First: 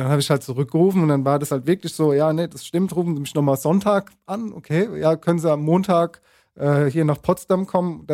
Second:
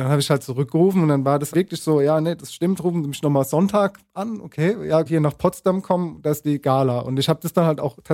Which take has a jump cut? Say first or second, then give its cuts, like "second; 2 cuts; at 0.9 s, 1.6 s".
second; 2 cuts; at 1.5 s, 5.1 s